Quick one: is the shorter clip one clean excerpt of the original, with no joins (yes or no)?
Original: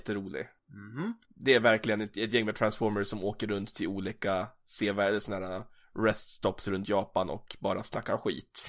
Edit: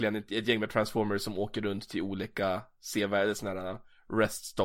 yes